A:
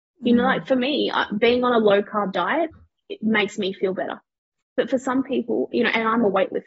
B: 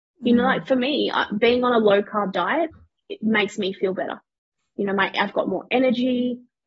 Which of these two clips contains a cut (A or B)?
A